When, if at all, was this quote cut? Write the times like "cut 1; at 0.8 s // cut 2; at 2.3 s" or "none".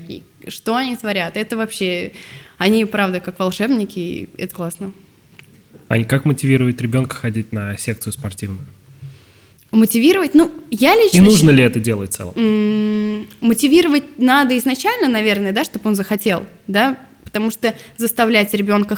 cut 1; at 4.5 s